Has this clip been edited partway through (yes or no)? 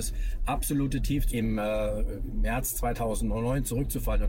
yes